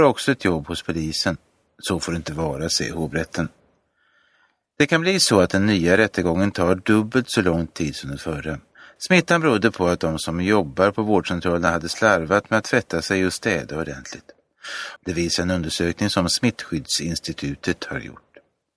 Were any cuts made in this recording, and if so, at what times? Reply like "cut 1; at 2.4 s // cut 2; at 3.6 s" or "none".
cut 1; at 9.0 s // cut 2; at 15.0 s